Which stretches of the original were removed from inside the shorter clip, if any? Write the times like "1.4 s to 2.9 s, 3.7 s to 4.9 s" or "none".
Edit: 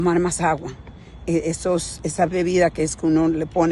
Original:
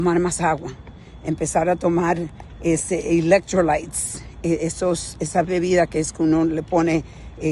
1.2 s to 4.4 s